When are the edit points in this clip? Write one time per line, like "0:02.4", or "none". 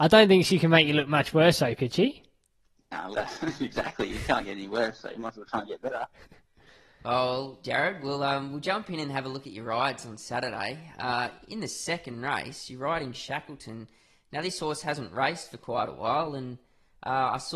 0:03.1